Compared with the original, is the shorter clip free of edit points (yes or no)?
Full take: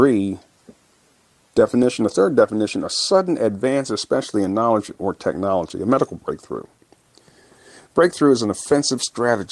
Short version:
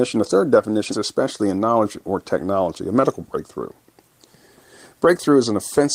no